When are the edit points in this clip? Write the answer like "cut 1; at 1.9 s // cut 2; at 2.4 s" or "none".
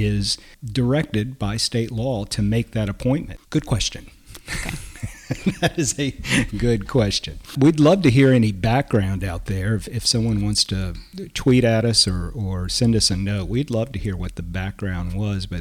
cut 1; at 3.4 s // cut 2; at 6.5 s